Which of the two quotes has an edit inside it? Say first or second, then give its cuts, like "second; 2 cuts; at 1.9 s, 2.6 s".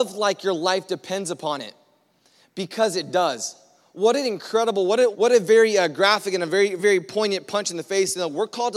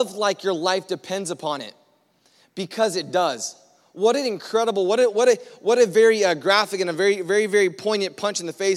first; 2 cuts; at 5.1 s, 6.8 s